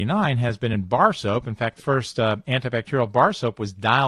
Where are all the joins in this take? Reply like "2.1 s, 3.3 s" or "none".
1.8 s